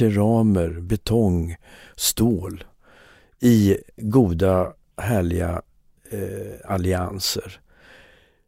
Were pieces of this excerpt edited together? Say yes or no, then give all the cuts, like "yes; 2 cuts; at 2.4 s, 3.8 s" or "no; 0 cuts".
no; 0 cuts